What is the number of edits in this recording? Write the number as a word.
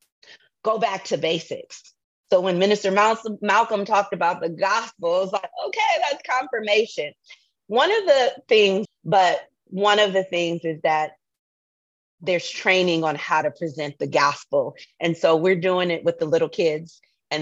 one